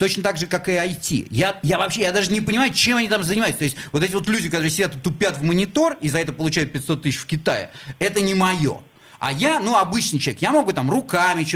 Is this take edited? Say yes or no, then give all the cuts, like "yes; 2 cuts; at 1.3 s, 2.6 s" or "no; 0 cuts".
no; 0 cuts